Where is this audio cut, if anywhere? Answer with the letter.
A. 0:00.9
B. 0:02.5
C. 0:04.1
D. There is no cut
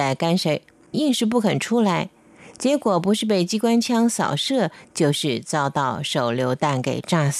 A